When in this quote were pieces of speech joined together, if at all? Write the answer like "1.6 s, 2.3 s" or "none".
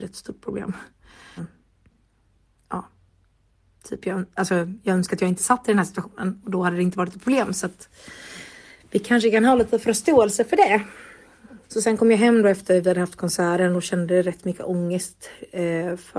1.4 s, 11.6 s